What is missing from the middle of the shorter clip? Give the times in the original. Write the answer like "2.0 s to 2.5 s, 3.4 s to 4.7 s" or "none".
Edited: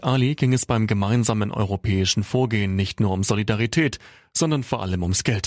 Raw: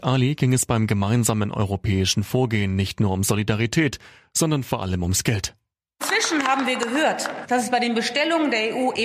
none